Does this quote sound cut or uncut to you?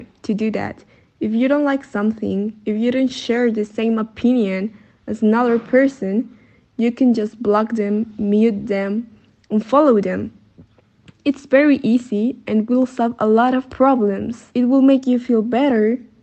uncut